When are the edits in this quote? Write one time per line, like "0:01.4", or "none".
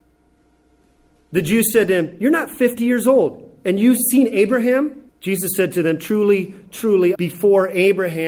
0:05.1
0:07.1